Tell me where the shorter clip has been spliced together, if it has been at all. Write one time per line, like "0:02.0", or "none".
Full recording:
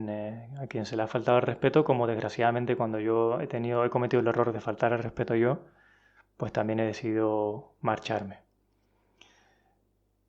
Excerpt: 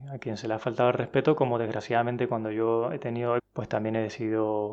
0:03.4